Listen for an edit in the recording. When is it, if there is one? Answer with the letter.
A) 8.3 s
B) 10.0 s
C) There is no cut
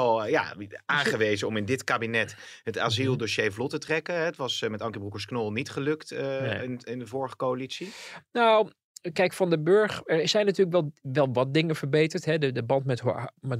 C